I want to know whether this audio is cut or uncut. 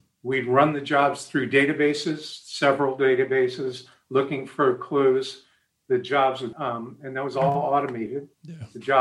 cut